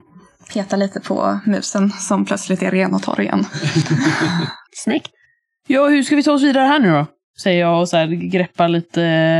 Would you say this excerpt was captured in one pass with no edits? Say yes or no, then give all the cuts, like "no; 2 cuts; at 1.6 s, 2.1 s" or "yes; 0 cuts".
yes; 0 cuts